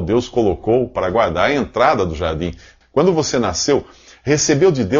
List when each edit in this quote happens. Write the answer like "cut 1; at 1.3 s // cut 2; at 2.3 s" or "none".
cut 1; at 2.8 s